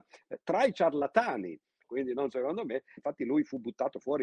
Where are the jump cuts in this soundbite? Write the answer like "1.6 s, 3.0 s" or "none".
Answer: 1.8 s, 3.0 s